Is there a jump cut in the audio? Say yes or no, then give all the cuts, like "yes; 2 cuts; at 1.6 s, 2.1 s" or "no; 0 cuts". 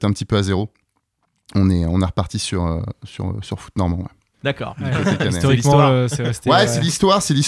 yes; 1 cut; at 4.3 s